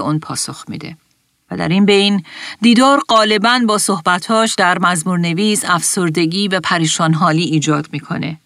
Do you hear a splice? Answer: no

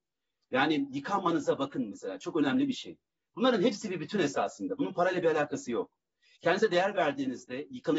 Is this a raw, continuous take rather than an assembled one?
yes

